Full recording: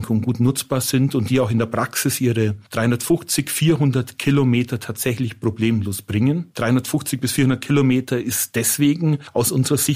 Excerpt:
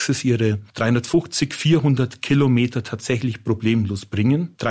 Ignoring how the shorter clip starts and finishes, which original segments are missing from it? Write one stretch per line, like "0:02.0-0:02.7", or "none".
none